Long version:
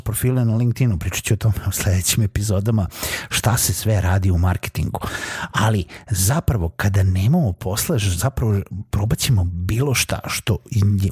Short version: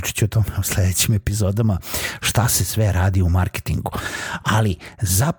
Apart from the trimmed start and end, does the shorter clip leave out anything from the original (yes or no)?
no